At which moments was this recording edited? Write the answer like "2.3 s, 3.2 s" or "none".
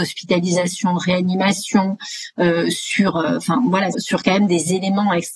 3.9 s